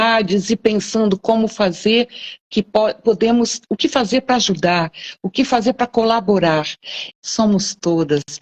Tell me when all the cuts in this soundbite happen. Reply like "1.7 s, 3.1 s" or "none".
7.1 s